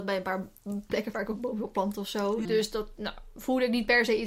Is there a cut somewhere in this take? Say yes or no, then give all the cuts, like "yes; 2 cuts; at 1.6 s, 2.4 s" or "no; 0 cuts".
yes; 1 cut; at 2.4 s